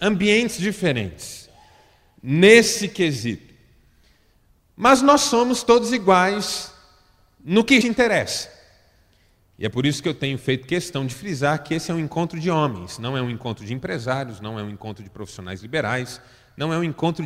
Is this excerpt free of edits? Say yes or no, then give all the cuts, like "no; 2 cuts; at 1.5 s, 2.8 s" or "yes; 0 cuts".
no; 1 cut; at 7.8 s